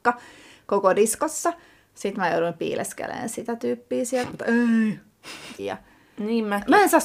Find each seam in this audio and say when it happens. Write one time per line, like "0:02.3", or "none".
0:04.3
0:05.6

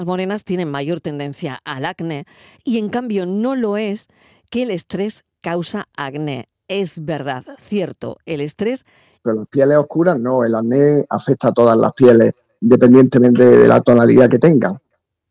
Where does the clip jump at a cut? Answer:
0:09.2

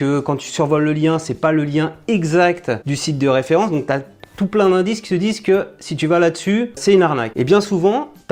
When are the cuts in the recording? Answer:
0:06.8

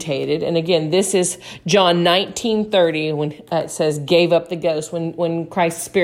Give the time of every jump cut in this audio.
none

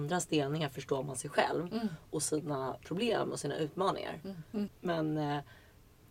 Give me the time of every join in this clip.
0:02.8
0:04.5

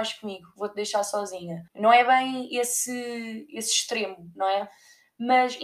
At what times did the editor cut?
0:01.7

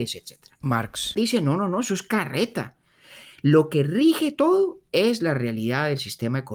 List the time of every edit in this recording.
none

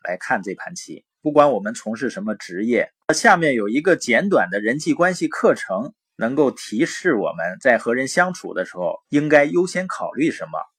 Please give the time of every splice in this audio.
0:01.2
0:03.0
0:09.0

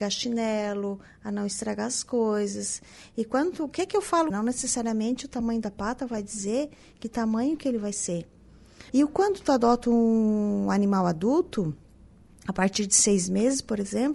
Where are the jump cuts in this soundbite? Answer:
0:04.3
0:08.9

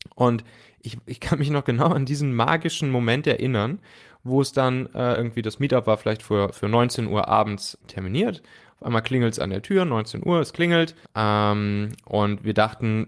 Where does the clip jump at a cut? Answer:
0:07.8
0:11.0

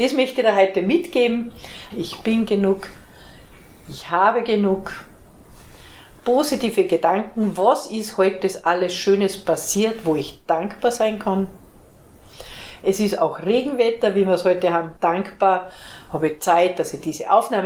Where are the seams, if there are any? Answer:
0:01.9
0:15.0

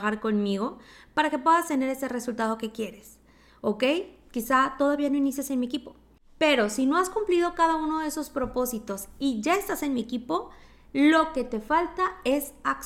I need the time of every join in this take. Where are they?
none

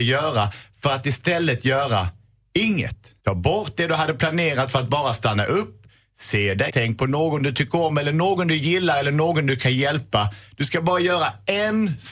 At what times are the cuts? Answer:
0:03.2
0:06.7

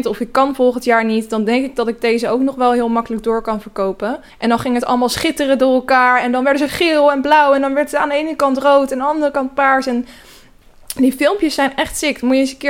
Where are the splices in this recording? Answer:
0:04.3

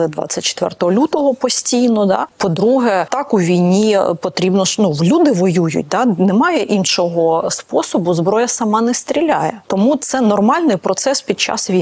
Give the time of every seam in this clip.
none

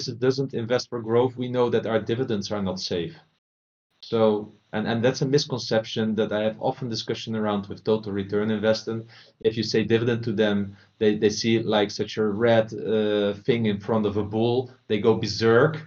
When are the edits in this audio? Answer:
none

